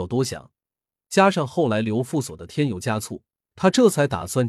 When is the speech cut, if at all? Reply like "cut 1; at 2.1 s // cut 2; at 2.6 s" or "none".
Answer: cut 1; at 3.5 s